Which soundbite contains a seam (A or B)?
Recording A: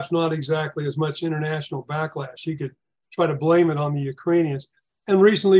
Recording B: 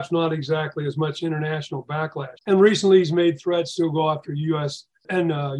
B